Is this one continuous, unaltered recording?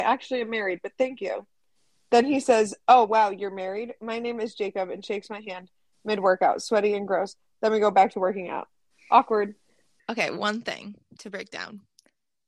yes; 0 cuts

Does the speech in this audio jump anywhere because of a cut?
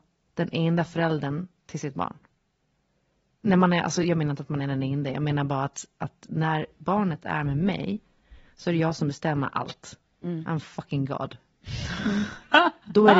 no; 0 cuts

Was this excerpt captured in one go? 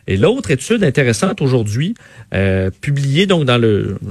yes; 0 cuts

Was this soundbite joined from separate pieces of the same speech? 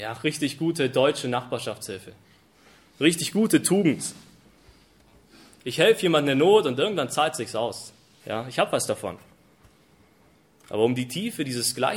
no; 0 cuts

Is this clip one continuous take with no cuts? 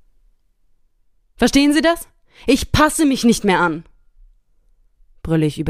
yes; 0 cuts

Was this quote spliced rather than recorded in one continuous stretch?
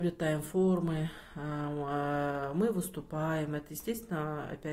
no; 0 cuts

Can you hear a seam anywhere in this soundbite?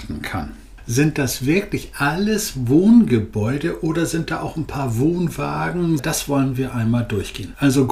yes; 1 cut; at 6.0 s

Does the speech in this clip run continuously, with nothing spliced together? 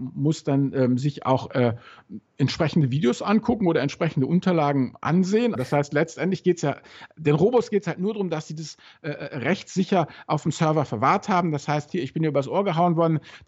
no; 2 cuts; at 5.6 s, 11.9 s

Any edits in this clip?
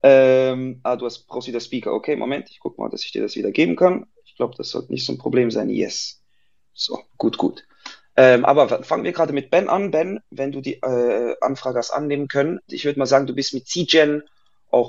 yes; 2 cuts; at 7.1 s, 12.7 s

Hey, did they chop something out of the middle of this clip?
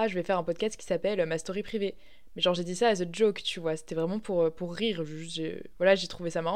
no; 0 cuts

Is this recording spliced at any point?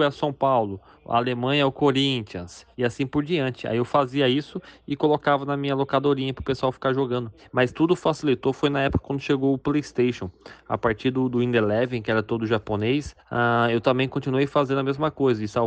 no; 0 cuts

